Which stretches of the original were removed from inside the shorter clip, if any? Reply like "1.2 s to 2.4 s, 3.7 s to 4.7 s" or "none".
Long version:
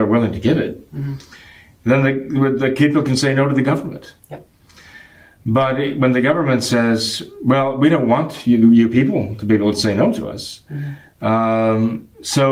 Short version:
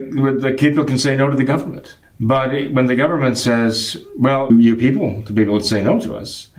4.2 s to 5.3 s, 7.8 s to 8.6 s